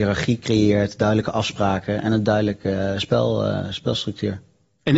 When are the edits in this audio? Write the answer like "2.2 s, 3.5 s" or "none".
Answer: none